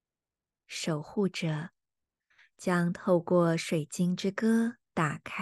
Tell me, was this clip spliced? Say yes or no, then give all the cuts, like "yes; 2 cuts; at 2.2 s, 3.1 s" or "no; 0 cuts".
no; 0 cuts